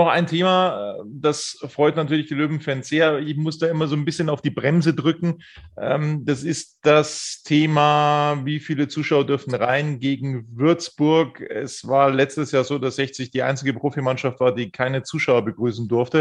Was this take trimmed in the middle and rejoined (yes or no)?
no